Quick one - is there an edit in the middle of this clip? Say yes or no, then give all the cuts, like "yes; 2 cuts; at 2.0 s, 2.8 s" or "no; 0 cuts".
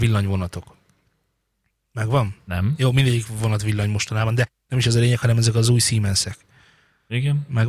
no; 0 cuts